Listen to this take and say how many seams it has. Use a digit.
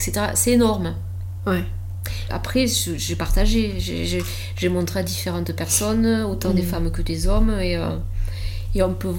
1